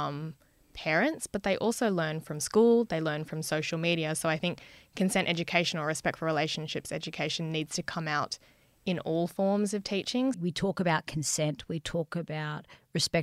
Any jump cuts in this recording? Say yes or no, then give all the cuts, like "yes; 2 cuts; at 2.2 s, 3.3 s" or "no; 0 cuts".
yes; 1 cut; at 10.3 s